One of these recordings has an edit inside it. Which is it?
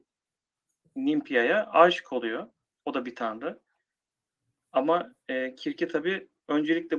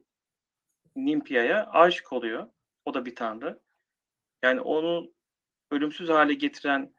second; 1 cut; at 4.4 s

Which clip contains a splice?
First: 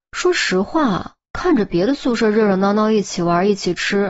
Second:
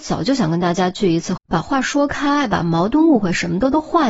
second; 1 cut; at 1.4 s

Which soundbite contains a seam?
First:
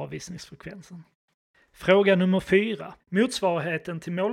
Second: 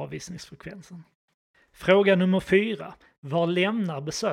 first; 1 cut; at 3.0 s

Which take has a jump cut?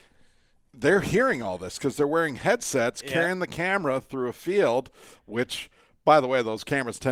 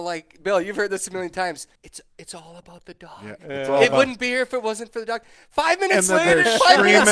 second; 1 cut; at 1.8 s

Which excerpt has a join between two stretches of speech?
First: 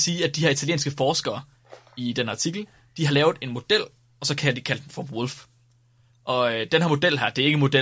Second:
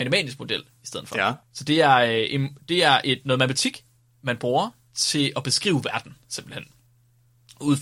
second; 1 cut; at 1.4 s

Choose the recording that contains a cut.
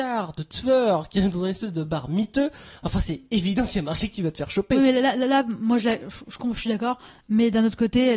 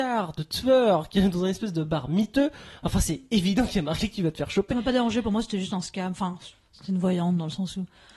second; 1 cut; at 4.7 s

